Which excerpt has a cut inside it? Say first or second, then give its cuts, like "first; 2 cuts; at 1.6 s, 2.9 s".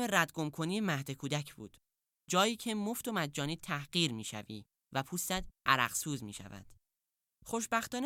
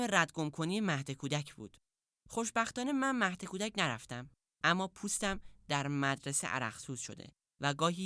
second; 1 cut; at 2.2 s